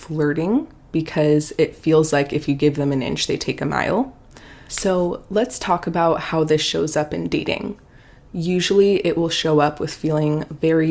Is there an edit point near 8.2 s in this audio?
no; 1 cut; at 4.7 s

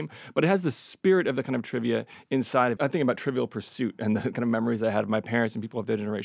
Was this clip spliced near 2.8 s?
yes; 1 cut; at 2.8 s

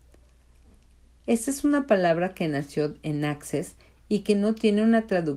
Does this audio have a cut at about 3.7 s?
no; 1 cut; at 1.2 s

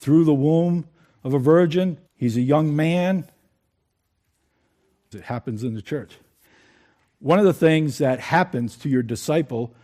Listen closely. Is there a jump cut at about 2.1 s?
yes; 2 cuts; at 2.1 s, 5.1 s

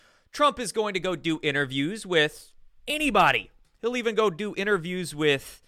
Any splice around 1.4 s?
no; 1 cut; at 2.8 s

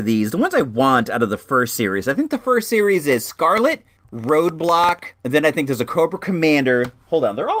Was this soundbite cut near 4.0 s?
yes; 2 cuts; at 4.0 s, 5.2 s

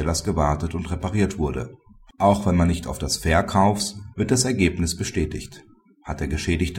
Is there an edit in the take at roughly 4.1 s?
yes; 1 cut; at 4.1 s

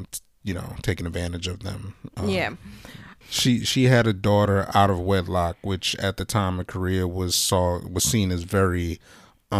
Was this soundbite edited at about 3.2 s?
yes; 1 cut; at 3.2 s

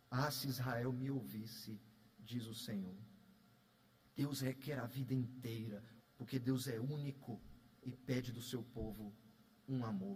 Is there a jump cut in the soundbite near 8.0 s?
no; 2 cuts; at 4.0 s, 6.0 s

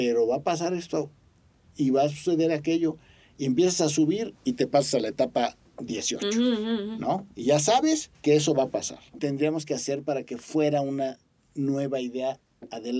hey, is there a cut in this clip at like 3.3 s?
no; 2 cuts; at 8.1 s, 9.2 s

